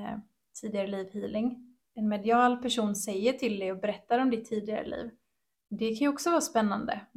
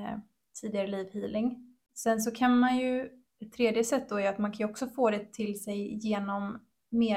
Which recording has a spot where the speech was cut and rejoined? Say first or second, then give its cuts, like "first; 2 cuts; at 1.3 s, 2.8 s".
first; 1 cut; at 1.8 s